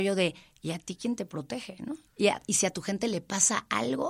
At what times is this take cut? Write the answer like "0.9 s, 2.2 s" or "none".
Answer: 2.1 s